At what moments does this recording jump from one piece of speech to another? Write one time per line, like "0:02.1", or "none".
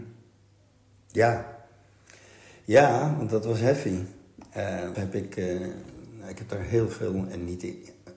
0:04.9